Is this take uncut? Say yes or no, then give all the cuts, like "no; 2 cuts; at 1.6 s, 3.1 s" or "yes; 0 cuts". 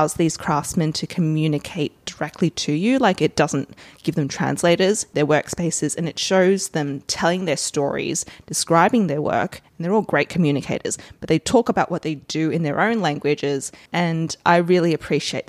no; 2 cuts; at 5.1 s, 13.9 s